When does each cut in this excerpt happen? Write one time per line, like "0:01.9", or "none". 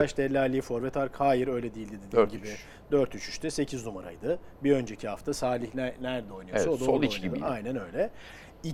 none

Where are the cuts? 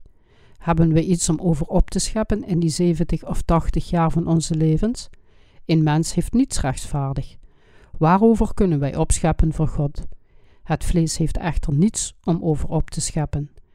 none

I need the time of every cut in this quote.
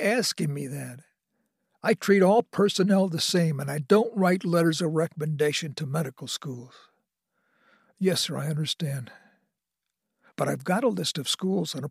none

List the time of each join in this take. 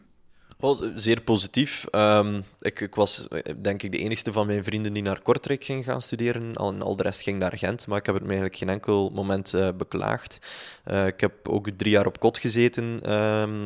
none

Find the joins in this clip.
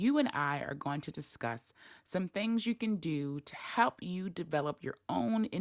none

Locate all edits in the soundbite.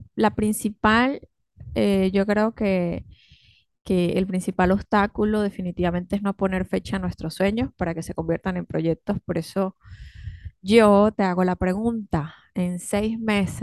none

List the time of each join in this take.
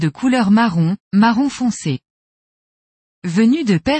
none

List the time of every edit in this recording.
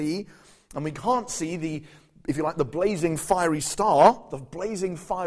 none

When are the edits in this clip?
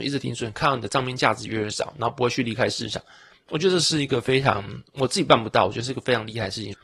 none

